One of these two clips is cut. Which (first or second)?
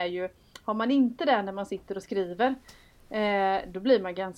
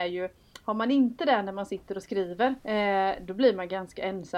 second